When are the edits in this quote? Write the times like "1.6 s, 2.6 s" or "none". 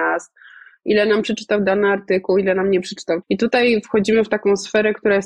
3.2 s